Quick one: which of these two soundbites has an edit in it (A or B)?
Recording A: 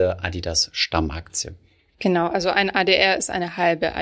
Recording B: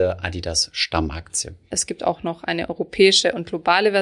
B